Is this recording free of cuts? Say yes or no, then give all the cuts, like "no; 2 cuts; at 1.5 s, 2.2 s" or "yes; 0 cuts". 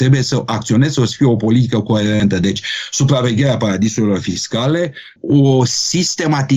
yes; 0 cuts